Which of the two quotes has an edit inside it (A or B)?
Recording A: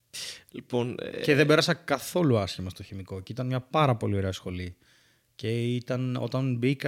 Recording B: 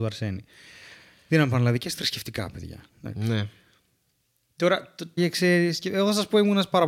B